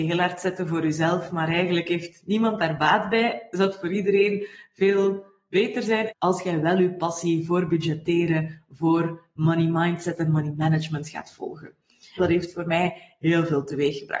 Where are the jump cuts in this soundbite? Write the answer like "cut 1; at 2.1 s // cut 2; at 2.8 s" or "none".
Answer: cut 1; at 6.1 s // cut 2; at 12.2 s